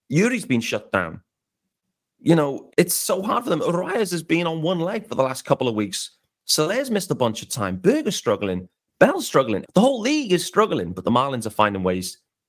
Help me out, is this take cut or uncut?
cut